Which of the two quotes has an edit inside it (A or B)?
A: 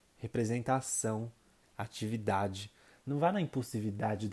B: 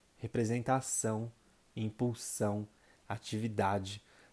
A